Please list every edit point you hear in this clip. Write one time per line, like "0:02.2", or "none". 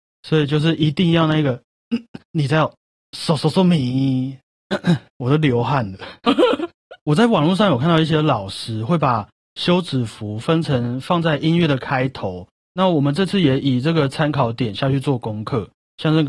0:12.6